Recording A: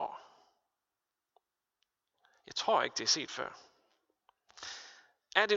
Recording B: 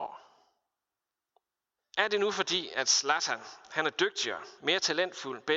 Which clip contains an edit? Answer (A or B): B